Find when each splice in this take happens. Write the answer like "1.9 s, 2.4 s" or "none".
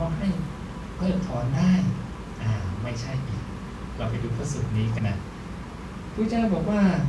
5.0 s